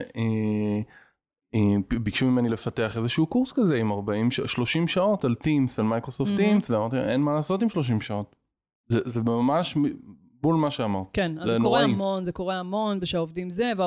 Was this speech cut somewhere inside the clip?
no; 0 cuts

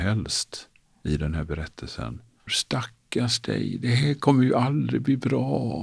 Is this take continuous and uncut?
no; 1 cut; at 2.5 s

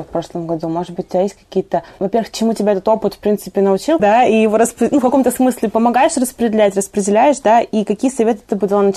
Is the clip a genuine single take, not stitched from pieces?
no; 1 cut; at 4.0 s

